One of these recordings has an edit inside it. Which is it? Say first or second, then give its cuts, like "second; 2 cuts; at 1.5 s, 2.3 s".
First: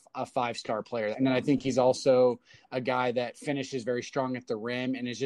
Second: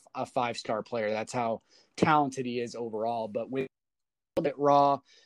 first; 1 cut; at 1.1 s